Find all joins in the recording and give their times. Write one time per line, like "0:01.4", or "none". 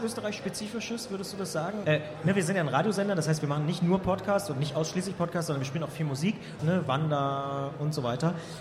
0:01.8
0:06.6